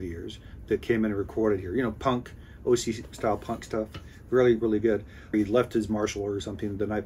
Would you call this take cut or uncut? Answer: cut